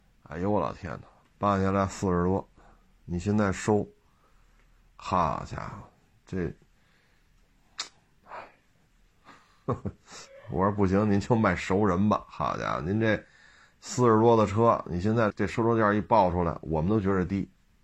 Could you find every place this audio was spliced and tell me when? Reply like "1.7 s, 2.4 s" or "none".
15.3 s